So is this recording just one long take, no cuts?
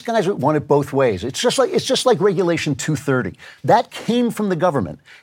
no; 1 cut; at 3.6 s

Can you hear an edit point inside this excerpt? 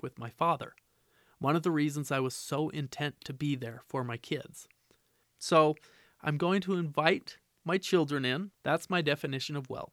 yes; 2 cuts; at 5.2 s, 8.5 s

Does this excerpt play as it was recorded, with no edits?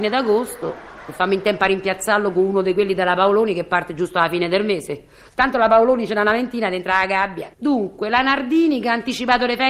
no; 1 cut; at 7.5 s

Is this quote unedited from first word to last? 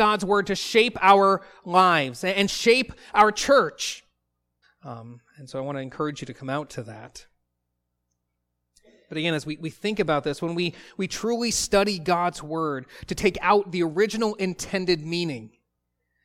no; 1 cut; at 4.6 s

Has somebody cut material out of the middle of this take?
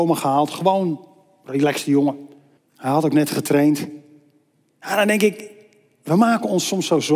yes; 1 cut; at 2.6 s

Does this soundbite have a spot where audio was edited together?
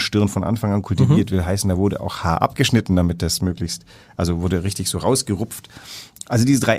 no; 0 cuts

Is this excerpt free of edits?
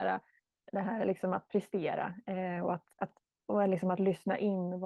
no; 1 cut; at 2.9 s

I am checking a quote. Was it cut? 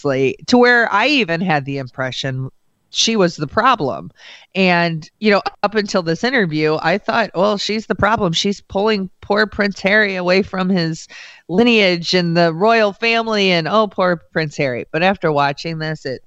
yes; 1 cut; at 5.1 s

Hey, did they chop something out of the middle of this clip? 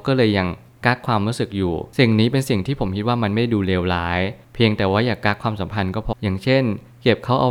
yes; 1 cut; at 6.1 s

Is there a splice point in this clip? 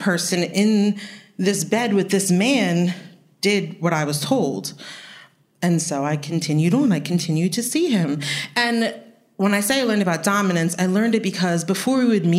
no; 0 cuts

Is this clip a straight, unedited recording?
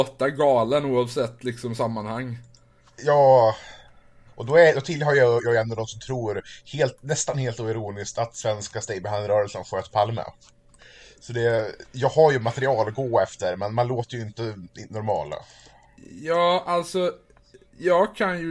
yes; 0 cuts

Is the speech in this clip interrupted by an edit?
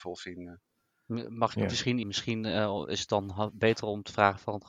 yes; 1 cut; at 2.0 s

